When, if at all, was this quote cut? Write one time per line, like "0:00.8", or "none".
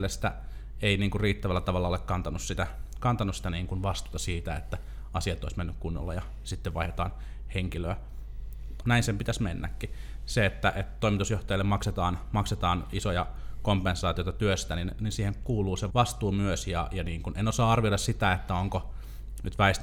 0:08.8
0:15.9